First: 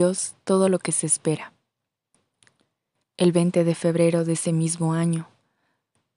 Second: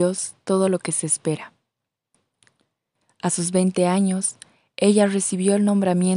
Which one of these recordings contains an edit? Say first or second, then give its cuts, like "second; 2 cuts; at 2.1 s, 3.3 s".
first; 1 cut; at 3.0 s